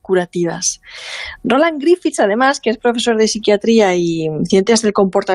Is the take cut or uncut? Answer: uncut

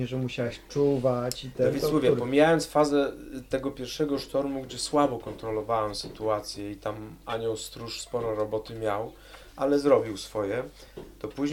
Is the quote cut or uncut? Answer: uncut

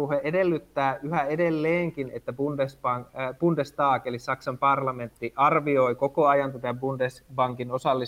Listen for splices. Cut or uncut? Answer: uncut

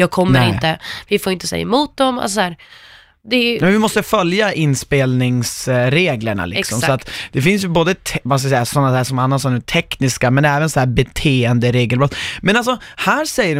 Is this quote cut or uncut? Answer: uncut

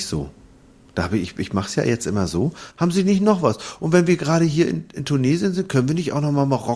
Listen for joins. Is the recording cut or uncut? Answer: cut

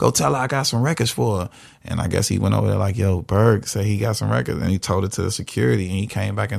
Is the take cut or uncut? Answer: uncut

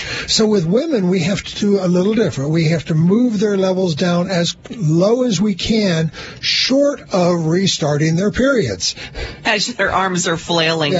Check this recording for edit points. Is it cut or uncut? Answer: cut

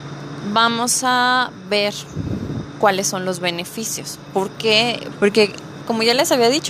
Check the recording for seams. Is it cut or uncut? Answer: cut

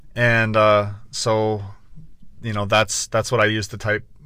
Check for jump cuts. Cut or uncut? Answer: uncut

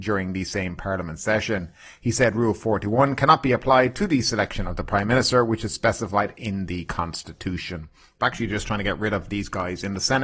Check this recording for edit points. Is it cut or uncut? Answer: cut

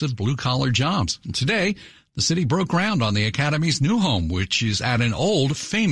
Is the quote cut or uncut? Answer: uncut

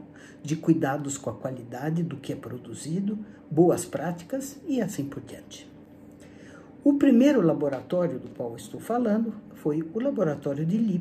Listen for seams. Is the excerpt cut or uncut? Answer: uncut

